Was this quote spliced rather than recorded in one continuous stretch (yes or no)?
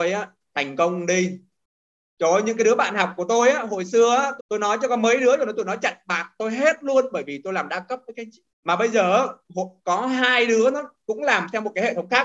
yes